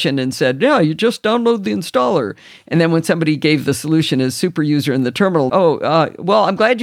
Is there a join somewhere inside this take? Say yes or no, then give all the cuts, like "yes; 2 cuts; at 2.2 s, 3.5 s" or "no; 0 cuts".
yes; 1 cut; at 5.5 s